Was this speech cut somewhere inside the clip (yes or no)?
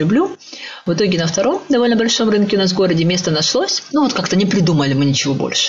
yes